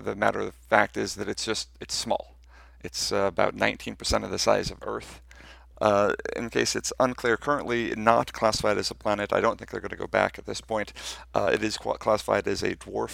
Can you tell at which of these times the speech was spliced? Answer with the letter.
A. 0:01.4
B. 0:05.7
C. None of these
B